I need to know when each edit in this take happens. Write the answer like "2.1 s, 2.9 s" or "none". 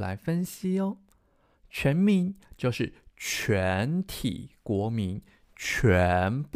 none